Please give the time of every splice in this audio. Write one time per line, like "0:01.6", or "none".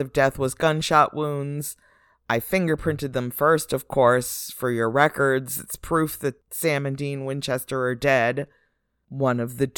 none